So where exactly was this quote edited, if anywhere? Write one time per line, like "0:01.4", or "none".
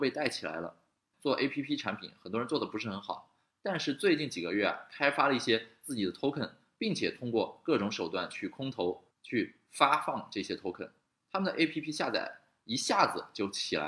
0:01.1
0:09.1